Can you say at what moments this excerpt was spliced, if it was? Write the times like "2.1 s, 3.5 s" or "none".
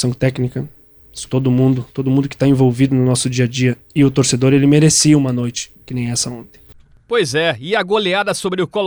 1.3 s